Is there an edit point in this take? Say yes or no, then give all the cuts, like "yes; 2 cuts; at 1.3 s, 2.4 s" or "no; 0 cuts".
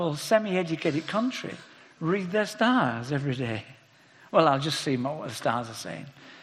no; 0 cuts